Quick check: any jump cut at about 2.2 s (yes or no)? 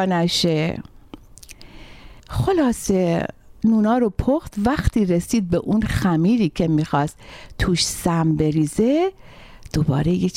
yes